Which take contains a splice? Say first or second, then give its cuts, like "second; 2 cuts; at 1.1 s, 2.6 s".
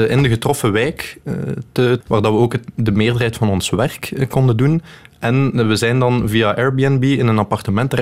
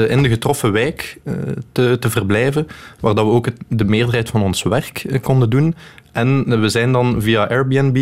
first; 1 cut; at 2.0 s